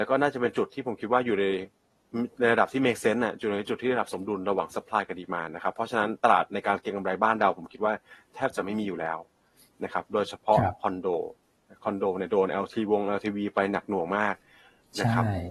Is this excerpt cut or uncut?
uncut